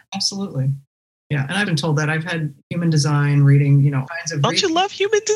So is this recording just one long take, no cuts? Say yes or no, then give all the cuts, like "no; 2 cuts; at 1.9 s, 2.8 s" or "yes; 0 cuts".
no; 2 cuts; at 1.6 s, 4.1 s